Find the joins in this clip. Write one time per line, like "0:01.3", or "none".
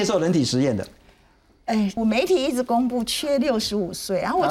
0:02.0